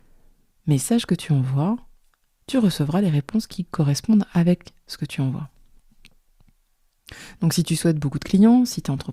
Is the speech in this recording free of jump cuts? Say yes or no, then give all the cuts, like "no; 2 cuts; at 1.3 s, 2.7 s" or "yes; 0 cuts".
yes; 0 cuts